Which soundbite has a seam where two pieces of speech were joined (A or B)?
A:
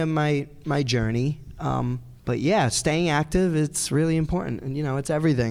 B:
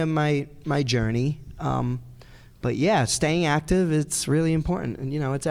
A